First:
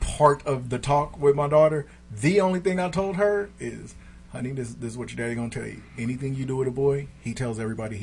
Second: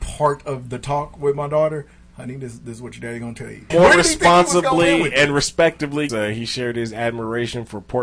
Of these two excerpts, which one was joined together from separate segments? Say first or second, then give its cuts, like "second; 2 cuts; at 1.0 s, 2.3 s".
second; 3 cuts; at 2.0 s, 3.7 s, 6.1 s